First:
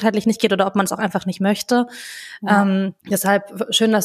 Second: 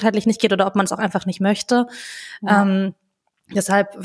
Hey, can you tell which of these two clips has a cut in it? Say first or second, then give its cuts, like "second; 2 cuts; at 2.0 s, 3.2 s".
first; 1 cut; at 3.0 s